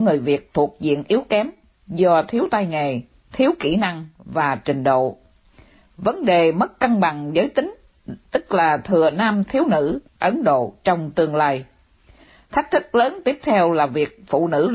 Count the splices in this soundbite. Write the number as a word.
one